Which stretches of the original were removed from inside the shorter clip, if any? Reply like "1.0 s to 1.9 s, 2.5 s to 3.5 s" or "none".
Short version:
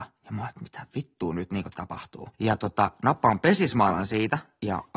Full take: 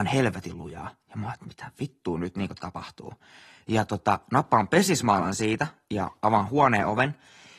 3.2 s to 3.6 s